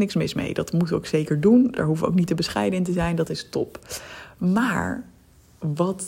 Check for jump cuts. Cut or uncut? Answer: uncut